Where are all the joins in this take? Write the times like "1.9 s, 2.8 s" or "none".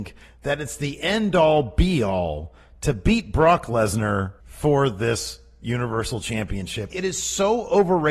4.4 s, 6.9 s